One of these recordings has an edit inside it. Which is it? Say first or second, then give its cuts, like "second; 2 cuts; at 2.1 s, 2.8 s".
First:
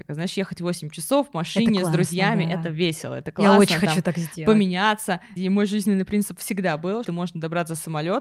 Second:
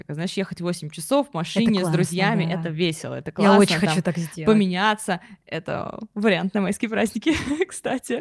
first; 2 cuts; at 5.4 s, 7.0 s